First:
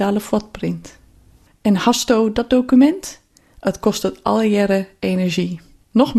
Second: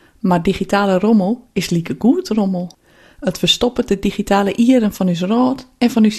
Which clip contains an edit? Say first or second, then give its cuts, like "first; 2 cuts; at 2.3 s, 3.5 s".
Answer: first; 1 cut; at 1.5 s